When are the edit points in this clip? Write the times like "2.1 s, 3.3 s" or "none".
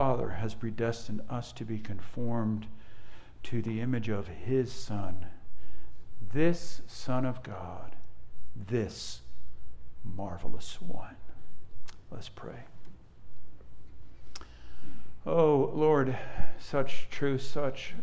none